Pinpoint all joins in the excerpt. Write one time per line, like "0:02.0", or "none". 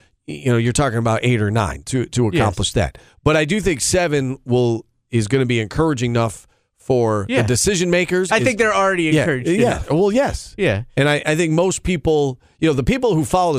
0:08.3